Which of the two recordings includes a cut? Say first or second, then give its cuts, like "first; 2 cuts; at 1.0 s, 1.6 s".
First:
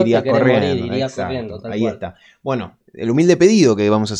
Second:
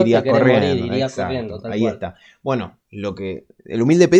first; 1 cut; at 2.8 s